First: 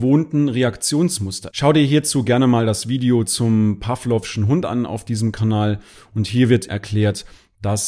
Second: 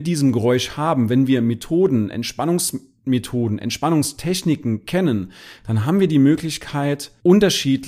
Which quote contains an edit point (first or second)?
first